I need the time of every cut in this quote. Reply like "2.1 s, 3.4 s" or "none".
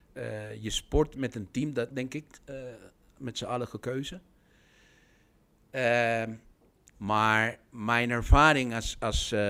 1.9 s, 6.9 s